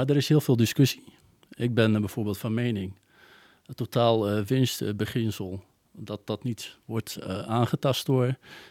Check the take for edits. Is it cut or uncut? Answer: uncut